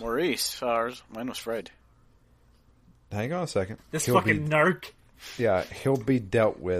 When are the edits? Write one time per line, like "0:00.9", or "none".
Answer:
0:03.8